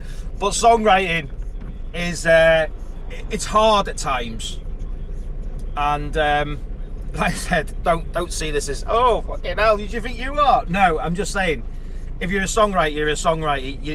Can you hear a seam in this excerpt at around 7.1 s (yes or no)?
no